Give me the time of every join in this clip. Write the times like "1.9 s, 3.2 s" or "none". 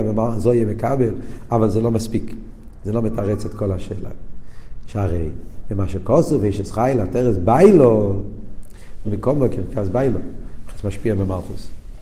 4.9 s, 9.0 s